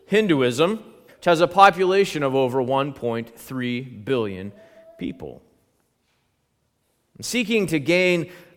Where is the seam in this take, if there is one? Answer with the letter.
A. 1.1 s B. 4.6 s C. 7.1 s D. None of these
A